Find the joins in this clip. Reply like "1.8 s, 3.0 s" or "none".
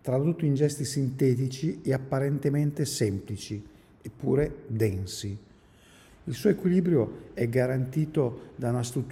6.1 s